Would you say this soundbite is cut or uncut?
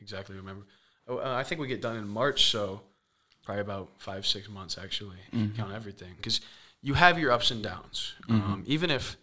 cut